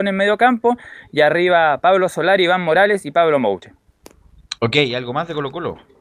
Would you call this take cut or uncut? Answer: uncut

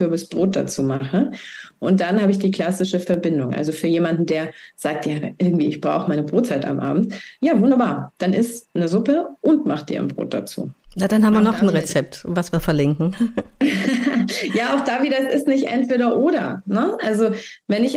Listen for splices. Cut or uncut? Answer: uncut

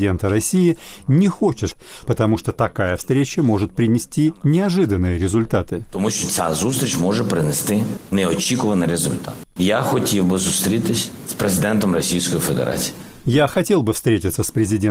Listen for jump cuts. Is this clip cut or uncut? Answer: cut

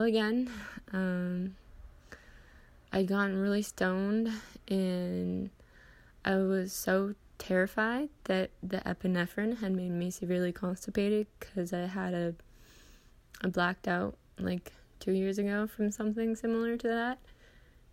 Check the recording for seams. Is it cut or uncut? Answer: uncut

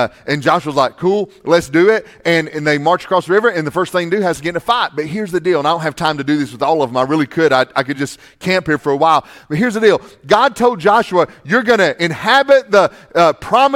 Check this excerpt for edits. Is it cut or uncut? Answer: uncut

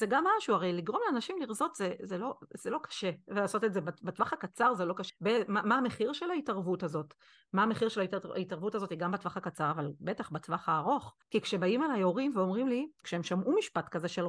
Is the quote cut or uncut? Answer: cut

